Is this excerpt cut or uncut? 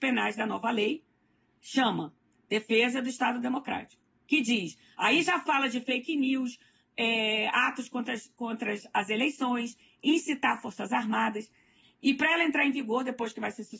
cut